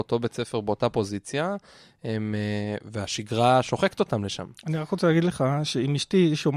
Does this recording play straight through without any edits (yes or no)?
yes